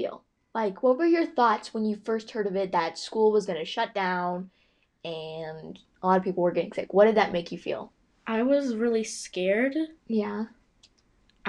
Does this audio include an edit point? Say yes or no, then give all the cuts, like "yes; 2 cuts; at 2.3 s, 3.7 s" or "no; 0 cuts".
no; 0 cuts